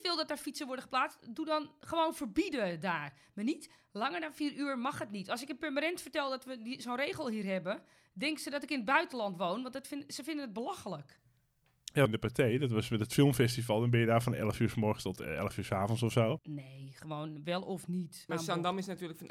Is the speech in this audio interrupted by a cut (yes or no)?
yes